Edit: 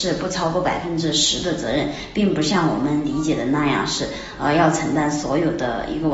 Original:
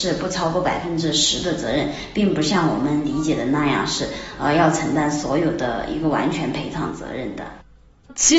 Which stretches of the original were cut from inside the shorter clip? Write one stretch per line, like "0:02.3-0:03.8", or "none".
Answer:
none